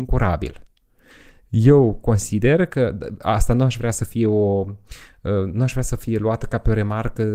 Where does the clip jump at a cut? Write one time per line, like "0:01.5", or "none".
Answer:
none